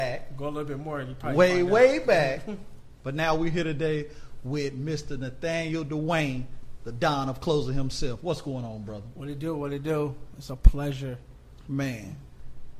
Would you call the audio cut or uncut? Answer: uncut